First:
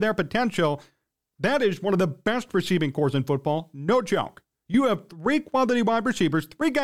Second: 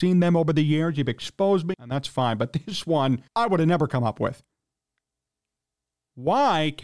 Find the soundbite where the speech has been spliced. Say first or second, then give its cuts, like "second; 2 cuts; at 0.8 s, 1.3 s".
second; 2 cuts; at 1.7 s, 3.3 s